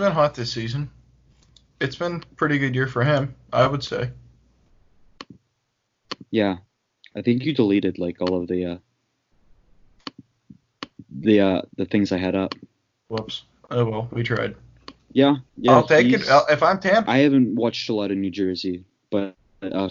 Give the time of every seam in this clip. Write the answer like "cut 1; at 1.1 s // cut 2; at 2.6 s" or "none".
cut 1; at 15.0 s // cut 2; at 17.0 s